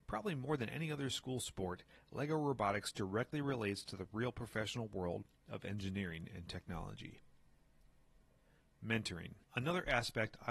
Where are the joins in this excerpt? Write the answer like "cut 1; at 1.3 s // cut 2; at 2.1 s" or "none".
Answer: cut 1; at 9.4 s